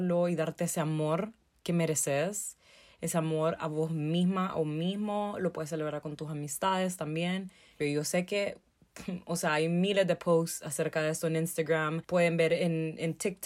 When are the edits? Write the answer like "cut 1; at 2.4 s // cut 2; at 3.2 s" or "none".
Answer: cut 1; at 7.8 s